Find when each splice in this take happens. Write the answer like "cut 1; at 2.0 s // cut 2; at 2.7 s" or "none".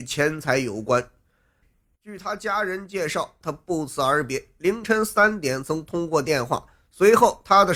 cut 1; at 1.6 s // cut 2; at 3.4 s